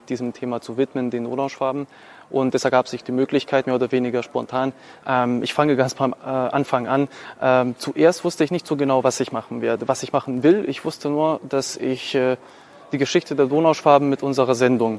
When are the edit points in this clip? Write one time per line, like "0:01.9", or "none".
0:03.6
0:05.0